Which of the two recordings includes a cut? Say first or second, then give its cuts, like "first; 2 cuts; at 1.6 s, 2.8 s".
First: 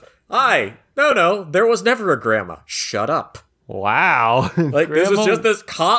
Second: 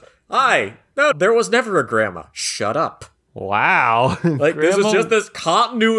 second; 1 cut; at 1.1 s